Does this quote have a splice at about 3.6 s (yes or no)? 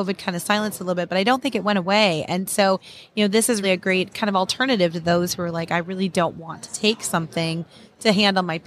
yes